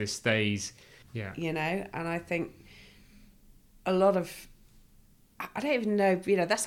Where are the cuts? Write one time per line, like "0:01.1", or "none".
0:01.0